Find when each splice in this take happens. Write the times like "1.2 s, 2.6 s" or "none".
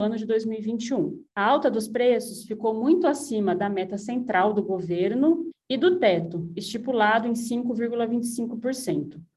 1.3 s, 5.5 s